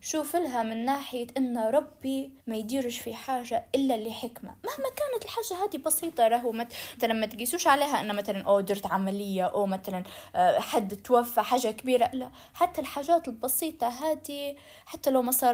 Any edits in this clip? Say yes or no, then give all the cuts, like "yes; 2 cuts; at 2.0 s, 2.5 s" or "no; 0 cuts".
yes; 3 cuts; at 2.4 s, 7.0 s, 12.1 s